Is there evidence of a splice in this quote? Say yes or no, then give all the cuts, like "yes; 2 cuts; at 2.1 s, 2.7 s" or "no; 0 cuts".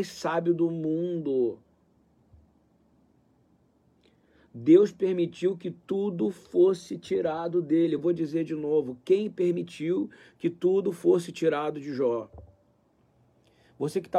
no; 0 cuts